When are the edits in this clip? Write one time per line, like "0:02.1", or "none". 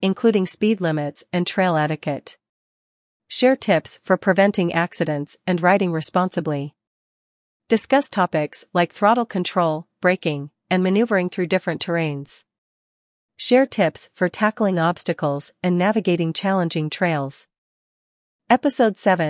0:07.6